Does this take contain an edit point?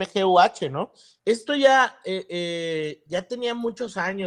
yes; 1 cut; at 1.2 s

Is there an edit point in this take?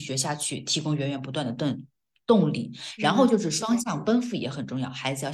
no; 0 cuts

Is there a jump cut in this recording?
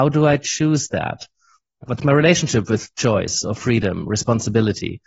yes; 1 cut; at 1.9 s

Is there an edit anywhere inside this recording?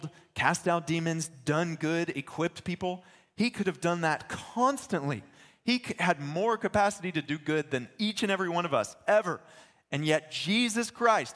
no; 0 cuts

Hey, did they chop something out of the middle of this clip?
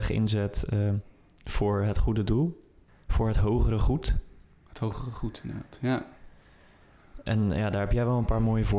yes; 1 cut; at 2.9 s

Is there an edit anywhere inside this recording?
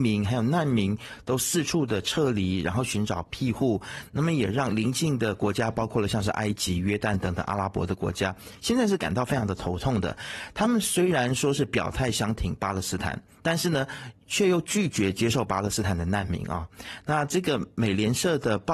no; 0 cuts

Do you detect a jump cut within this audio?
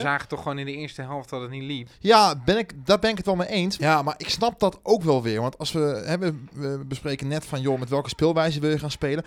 yes; 1 cut; at 3.8 s

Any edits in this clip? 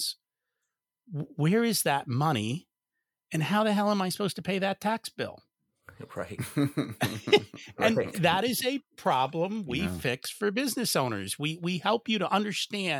no; 0 cuts

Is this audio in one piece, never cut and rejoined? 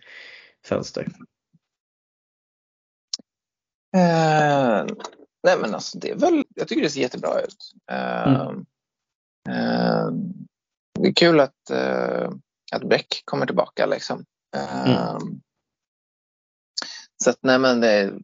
no; 1 cut; at 6.4 s

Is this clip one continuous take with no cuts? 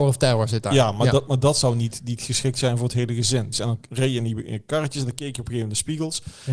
no; 1 cut; at 3.5 s

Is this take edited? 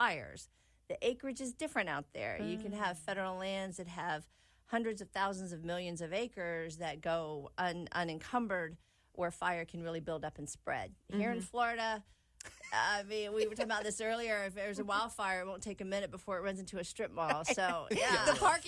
no; 0 cuts

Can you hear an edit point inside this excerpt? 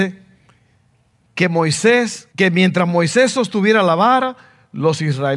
yes; 1 cut; at 2.3 s

